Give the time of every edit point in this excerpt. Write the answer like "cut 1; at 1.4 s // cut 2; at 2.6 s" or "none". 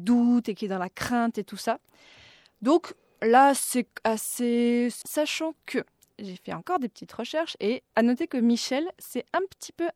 cut 1; at 5.0 s // cut 2; at 7.9 s

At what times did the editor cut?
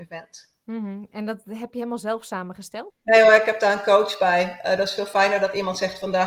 cut 1; at 2.9 s

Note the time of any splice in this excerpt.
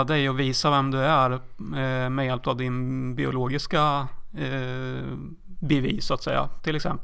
none

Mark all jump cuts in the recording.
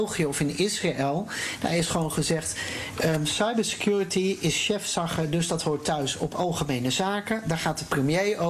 none

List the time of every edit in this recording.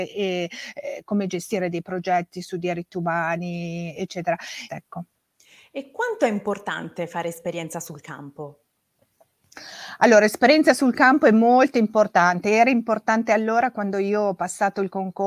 cut 1; at 4.7 s

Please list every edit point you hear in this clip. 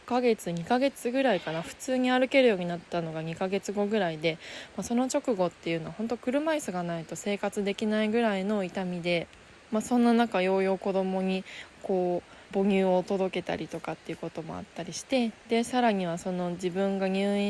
cut 1; at 12.5 s

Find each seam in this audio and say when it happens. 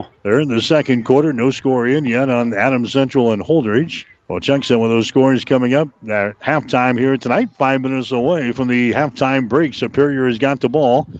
cut 1; at 4.2 s

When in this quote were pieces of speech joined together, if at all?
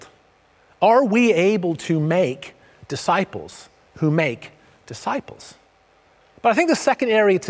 cut 1; at 6.3 s

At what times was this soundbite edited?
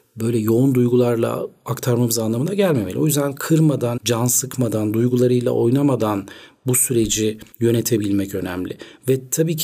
cut 1; at 4.0 s // cut 2; at 7.5 s

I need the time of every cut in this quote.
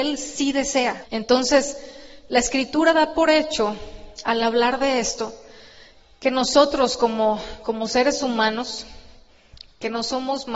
cut 1; at 1.0 s

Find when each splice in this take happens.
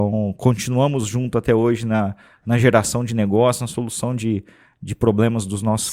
none

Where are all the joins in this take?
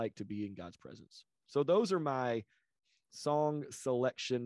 none

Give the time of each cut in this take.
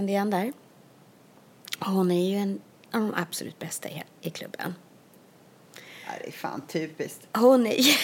none

